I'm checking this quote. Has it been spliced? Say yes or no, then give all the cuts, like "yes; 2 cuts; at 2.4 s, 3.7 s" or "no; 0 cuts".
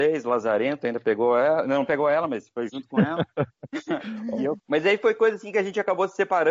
no; 0 cuts